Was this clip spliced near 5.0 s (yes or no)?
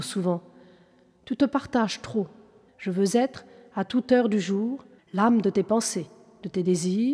yes